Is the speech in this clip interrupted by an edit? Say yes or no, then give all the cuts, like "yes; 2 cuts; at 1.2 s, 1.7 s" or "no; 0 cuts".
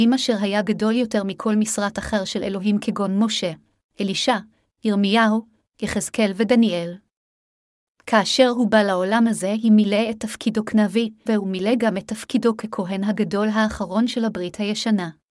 yes; 1 cut; at 11.3 s